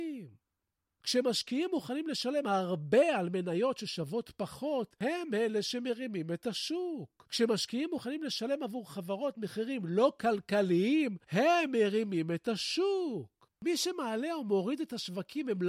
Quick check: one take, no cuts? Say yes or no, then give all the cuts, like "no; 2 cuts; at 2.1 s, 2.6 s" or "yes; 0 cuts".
no; 1 cut; at 13.5 s